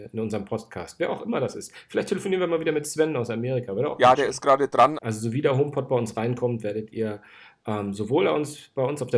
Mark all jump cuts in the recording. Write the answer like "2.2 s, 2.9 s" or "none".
5.0 s

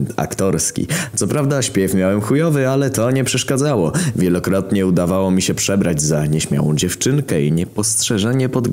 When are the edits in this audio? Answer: none

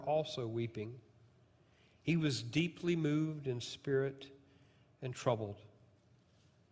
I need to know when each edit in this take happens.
none

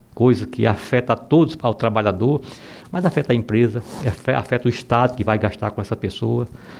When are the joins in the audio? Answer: 1.6 s

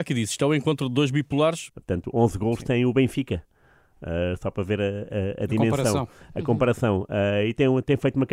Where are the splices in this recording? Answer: 1.7 s

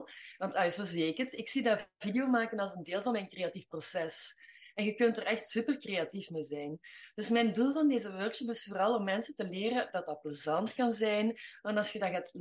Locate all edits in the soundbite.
none

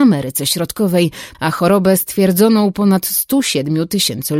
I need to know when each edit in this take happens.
1.3 s

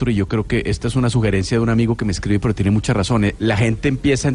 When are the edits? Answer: 3.4 s

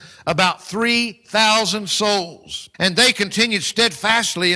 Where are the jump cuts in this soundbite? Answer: 2.7 s

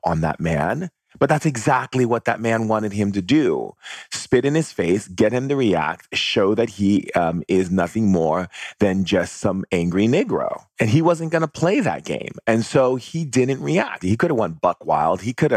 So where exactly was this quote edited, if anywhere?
14.0 s

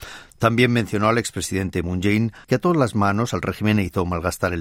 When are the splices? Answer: 2.4 s

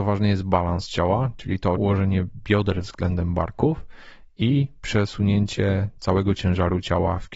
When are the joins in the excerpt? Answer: 1.7 s

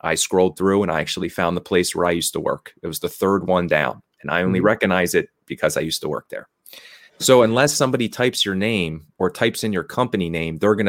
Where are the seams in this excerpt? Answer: 7.1 s

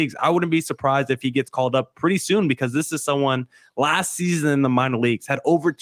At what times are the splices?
none

